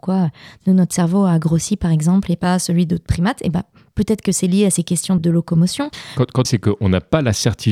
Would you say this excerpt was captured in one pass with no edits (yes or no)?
no